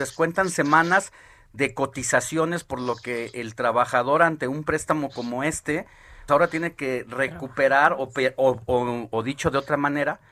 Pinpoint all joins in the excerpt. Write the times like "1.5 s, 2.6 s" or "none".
6.3 s